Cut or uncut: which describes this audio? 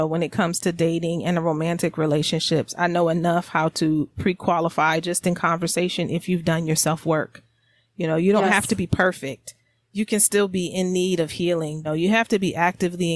cut